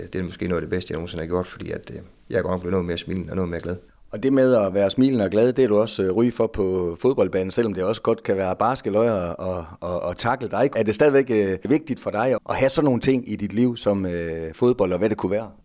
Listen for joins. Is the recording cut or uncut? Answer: cut